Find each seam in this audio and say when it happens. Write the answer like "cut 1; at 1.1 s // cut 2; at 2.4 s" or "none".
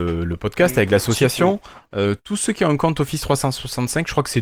none